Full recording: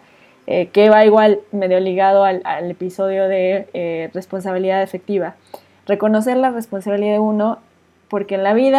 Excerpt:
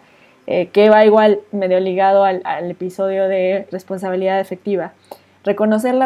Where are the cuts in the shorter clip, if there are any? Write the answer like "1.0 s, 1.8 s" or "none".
3.7 s